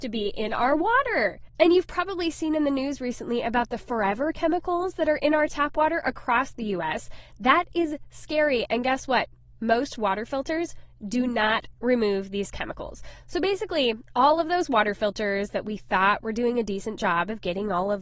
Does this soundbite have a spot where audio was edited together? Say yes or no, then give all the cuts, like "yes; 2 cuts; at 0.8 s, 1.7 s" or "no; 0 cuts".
no; 0 cuts